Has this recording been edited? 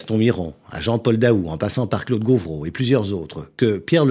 no; 0 cuts

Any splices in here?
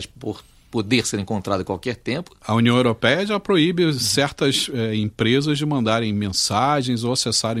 no; 0 cuts

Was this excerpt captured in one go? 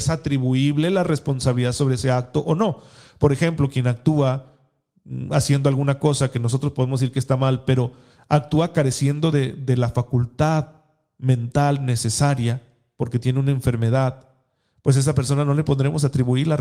yes; 0 cuts

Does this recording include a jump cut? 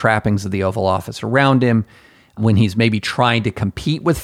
no; 0 cuts

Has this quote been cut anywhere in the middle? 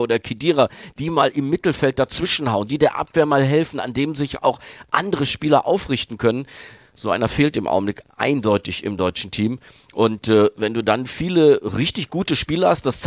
no; 0 cuts

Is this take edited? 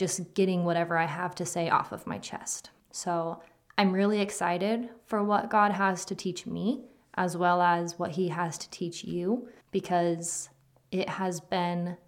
yes; 2 cuts; at 2.8 s, 9.6 s

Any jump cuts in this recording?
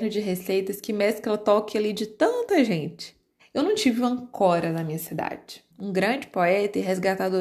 yes; 2 cuts; at 3.4 s, 5.7 s

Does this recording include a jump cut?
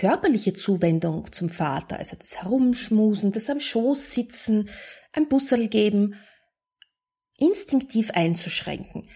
no; 0 cuts

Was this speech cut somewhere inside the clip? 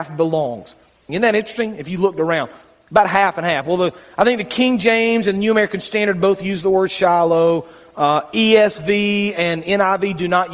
yes; 1 cut; at 1.1 s

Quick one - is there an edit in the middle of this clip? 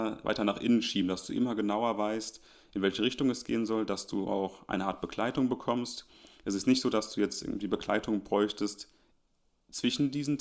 no; 0 cuts

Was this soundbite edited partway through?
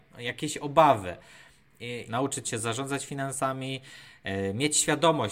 yes; 1 cut; at 2.1 s

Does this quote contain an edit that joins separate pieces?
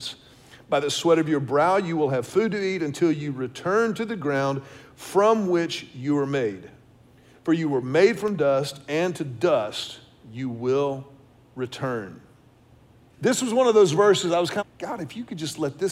yes; 2 cuts; at 13.1 s, 14.6 s

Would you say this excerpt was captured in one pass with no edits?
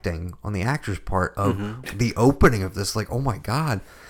no; 1 cut; at 1.8 s

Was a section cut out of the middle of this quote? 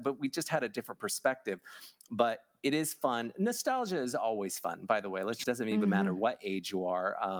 yes; 1 cut; at 5.4 s

